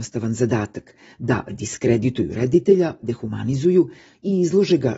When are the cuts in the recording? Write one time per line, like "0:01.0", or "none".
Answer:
0:03.0